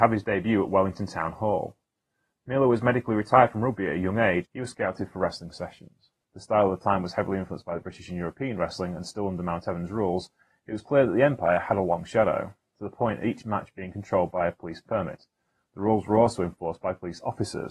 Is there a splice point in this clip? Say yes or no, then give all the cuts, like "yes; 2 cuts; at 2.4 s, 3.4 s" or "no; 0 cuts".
yes; 2 cuts; at 4.4 s, 6.2 s